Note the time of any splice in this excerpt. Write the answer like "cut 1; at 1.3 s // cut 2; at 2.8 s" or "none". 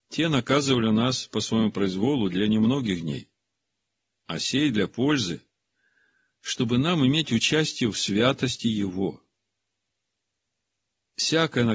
none